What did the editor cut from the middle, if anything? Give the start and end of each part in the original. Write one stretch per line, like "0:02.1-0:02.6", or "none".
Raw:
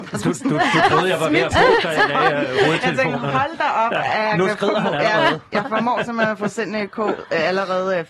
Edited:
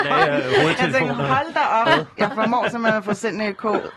0:03.9-0:05.2

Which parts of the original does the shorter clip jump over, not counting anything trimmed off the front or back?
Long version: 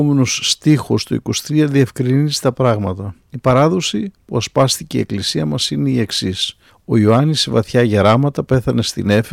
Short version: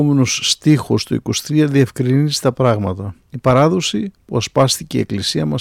none

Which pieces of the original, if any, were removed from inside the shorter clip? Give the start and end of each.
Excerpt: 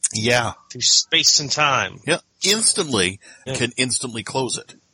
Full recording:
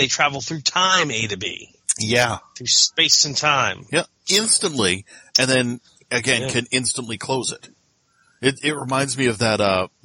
0:05.3-0:06.4

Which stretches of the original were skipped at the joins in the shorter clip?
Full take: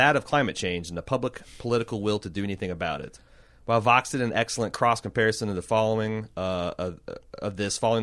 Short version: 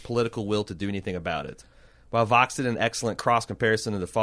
none

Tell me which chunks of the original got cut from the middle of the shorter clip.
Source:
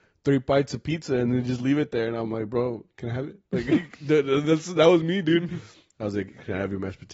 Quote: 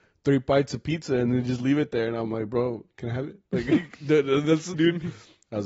0:04.7-0:05.2

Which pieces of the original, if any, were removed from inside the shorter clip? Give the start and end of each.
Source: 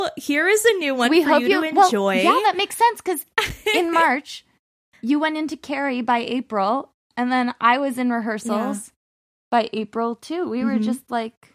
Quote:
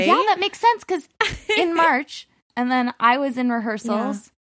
0:04.6-0:07.1

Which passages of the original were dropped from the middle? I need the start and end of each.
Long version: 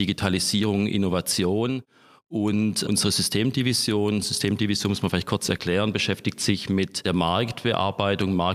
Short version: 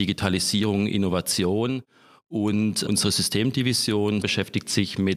0:04.2-0:05.9

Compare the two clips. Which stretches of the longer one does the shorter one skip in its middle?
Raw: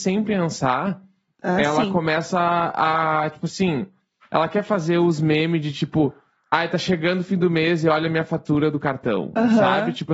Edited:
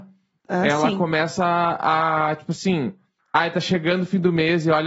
0:04.1-0:06.4

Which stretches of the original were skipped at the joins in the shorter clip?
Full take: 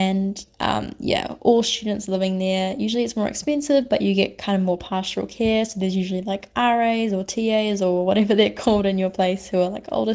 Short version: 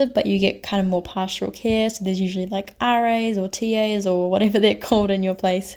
none

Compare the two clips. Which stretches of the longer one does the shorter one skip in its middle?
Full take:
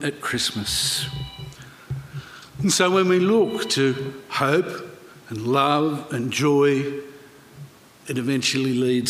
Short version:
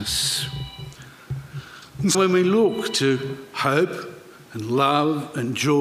0:02.7-0:02.9

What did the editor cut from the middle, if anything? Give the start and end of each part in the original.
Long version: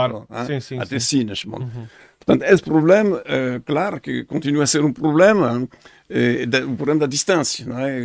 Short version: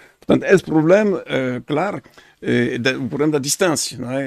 0:04.0-0:05.7

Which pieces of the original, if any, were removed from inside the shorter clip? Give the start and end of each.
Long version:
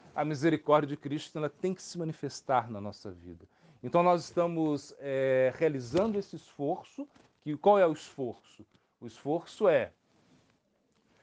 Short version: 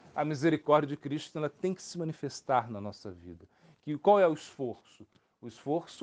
0:03.7-0:07.3

